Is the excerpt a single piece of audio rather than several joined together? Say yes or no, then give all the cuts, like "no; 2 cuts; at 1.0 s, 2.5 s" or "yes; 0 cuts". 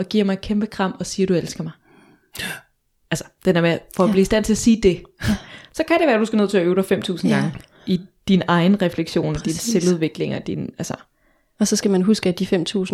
yes; 0 cuts